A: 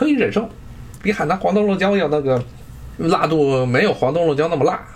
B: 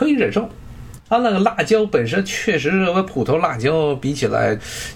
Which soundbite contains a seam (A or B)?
B